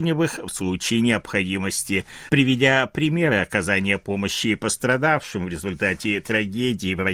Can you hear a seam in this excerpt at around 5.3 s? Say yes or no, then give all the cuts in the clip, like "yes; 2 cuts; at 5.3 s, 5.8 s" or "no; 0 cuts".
no; 1 cut; at 2.3 s